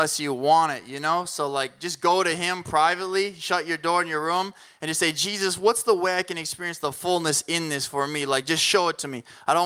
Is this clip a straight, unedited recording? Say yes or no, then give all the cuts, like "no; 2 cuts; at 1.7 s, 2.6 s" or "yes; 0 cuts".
yes; 0 cuts